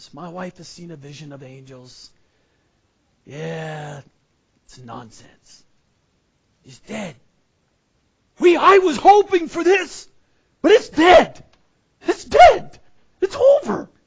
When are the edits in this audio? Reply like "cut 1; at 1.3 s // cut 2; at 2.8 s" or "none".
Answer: none